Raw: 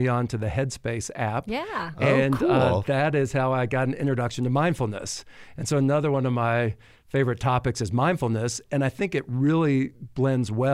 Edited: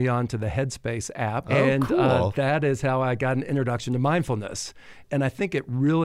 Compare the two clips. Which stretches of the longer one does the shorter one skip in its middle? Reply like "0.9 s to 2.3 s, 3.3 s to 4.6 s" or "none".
1.4 s to 2.0 s, 5.6 s to 8.6 s